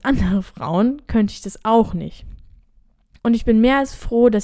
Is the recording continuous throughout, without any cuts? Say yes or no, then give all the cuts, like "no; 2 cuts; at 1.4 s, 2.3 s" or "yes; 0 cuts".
no; 1 cut; at 3.2 s